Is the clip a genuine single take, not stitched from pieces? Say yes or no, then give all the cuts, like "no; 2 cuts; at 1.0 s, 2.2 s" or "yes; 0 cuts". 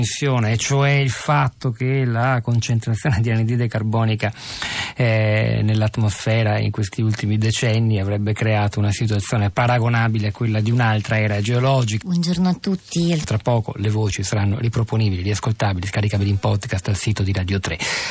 no; 2 cuts; at 12.0 s, 13.2 s